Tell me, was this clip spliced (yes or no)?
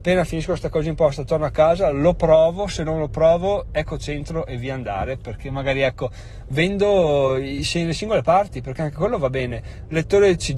no